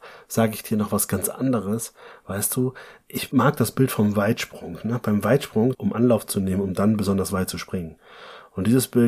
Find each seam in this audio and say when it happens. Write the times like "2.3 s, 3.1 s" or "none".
5.7 s

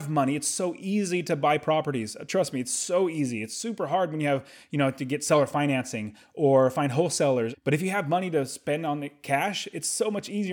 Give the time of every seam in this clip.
7.5 s

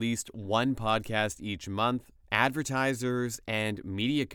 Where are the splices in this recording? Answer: 2.2 s

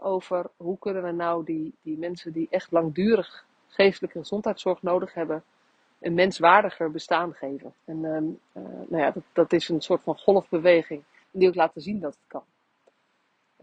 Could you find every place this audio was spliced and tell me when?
7.8 s, 11.2 s

